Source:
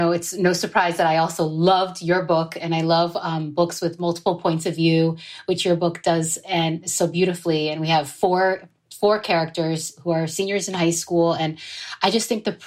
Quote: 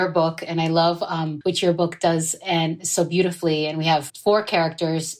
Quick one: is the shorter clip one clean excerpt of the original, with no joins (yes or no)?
no